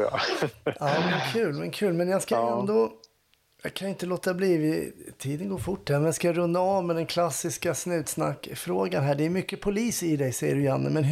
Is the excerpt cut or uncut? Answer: uncut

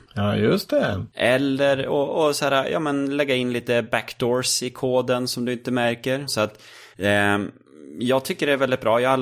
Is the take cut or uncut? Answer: cut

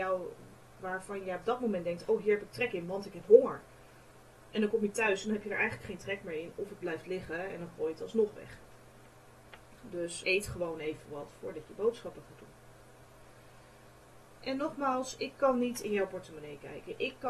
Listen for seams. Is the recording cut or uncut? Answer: cut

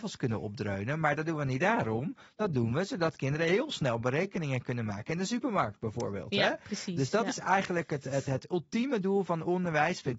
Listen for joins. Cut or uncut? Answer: uncut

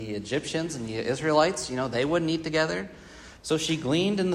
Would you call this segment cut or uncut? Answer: cut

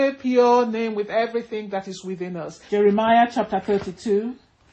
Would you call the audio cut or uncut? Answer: cut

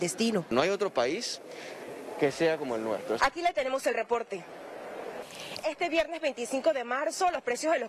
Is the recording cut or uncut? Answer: cut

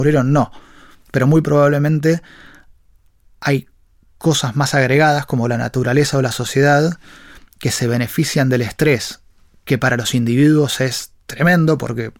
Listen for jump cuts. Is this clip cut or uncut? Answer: uncut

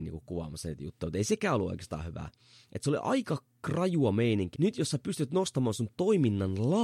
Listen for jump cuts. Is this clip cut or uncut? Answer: cut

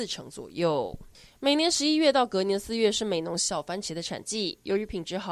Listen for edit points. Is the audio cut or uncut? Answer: uncut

